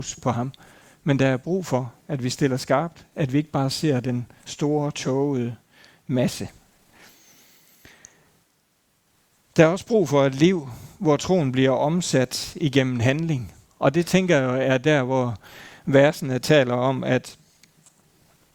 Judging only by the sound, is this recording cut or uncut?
uncut